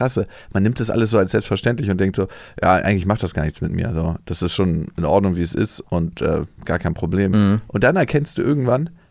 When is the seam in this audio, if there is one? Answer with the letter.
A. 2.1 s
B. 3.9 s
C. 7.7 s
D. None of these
D